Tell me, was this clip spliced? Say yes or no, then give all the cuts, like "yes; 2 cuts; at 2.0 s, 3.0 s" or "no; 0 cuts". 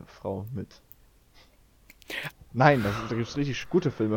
yes; 1 cut; at 2.3 s